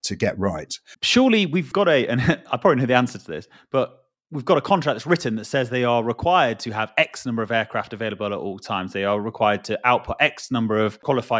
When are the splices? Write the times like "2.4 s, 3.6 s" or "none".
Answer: 0.9 s

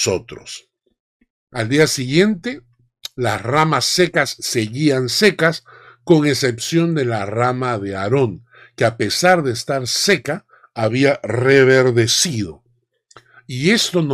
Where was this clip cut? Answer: none

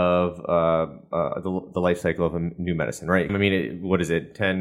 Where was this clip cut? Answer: 3.3 s

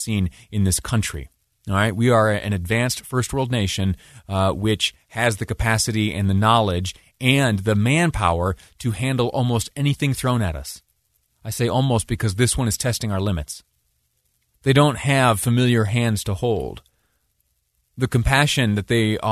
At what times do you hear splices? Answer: 14.5 s

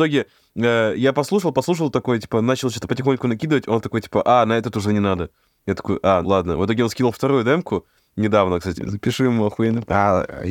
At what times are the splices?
6.2 s, 8.7 s

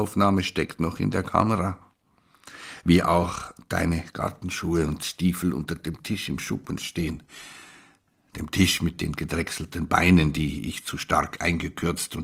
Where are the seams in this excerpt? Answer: none

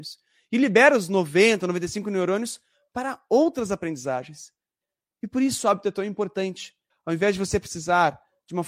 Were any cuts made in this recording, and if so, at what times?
6.9 s

